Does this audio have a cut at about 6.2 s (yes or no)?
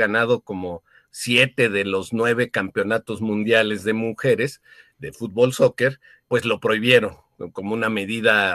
yes